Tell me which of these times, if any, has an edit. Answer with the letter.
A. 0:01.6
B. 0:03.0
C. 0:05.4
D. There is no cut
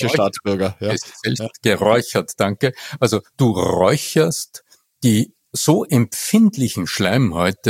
D